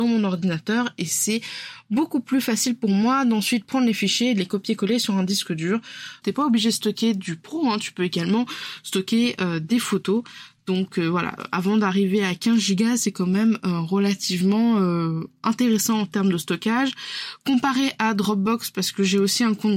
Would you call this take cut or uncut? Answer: cut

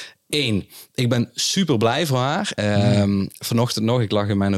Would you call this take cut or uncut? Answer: cut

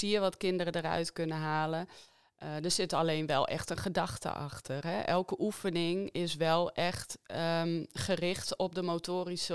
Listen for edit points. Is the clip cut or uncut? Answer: uncut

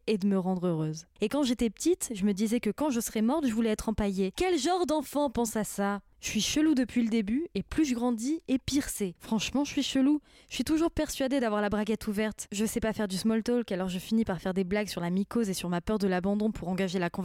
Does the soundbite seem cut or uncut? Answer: cut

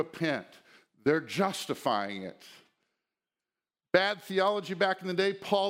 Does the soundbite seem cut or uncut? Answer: uncut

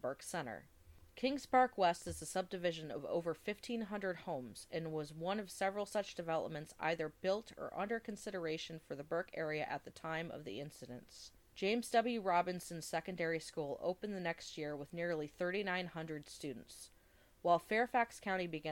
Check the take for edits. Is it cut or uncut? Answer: uncut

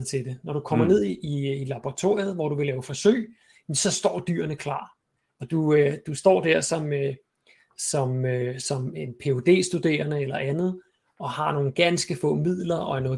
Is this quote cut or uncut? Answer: cut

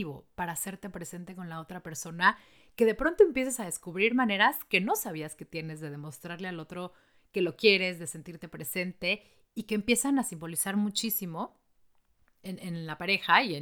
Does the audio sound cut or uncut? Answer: uncut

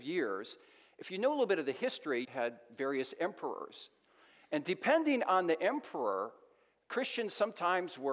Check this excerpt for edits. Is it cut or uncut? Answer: cut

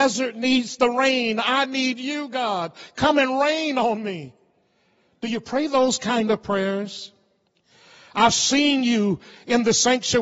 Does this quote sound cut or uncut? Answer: uncut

